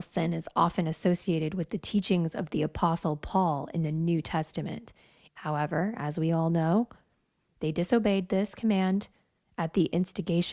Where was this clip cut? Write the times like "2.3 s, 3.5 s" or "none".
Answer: 5.3 s